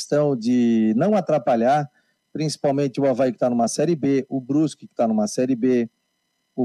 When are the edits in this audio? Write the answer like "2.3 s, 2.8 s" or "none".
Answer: none